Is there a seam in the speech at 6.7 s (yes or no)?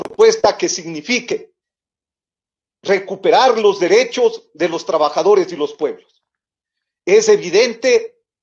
no